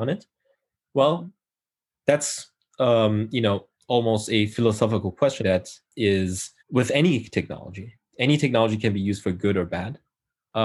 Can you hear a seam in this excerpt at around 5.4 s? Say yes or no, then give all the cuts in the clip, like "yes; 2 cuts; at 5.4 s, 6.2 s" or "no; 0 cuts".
yes; 2 cuts; at 5.4 s, 6.6 s